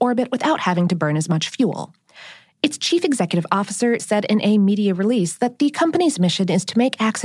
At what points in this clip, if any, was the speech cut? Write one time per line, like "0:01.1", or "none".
0:02.6
0:04.0